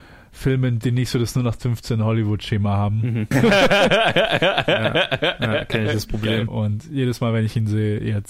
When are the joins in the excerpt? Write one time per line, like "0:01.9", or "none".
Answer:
0:03.3
0:06.5